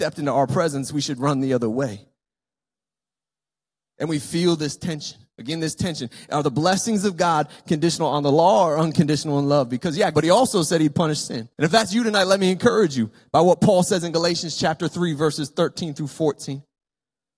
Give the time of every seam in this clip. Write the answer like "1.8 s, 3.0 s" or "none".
10.1 s, 11.5 s

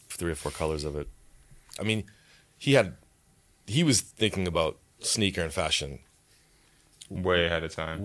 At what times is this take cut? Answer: 1.8 s

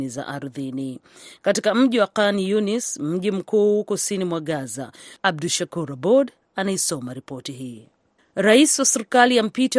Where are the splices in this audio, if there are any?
5.2 s, 8.2 s

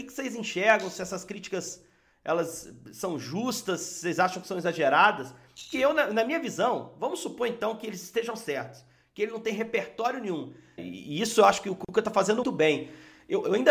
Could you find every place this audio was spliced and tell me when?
10.8 s, 12.4 s

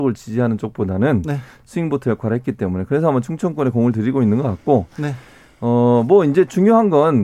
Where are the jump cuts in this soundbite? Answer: none

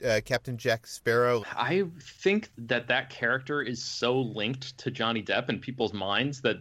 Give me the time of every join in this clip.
1.4 s, 2.5 s

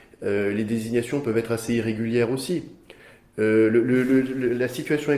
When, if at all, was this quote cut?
none

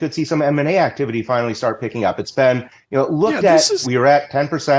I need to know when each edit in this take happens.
3.8 s

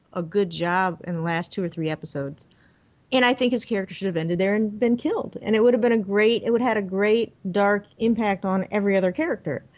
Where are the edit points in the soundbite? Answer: none

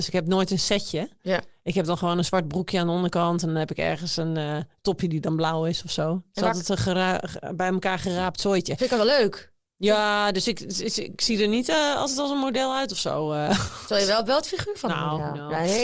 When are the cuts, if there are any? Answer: none

